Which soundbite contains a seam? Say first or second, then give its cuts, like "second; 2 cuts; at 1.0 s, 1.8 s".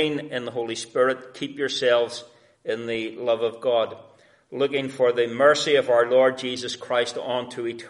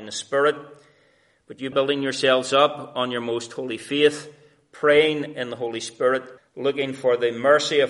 second; 2 cuts; at 1.7 s, 6.4 s